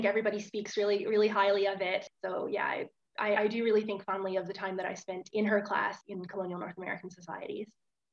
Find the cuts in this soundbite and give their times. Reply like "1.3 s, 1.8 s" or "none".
2.2 s, 3.4 s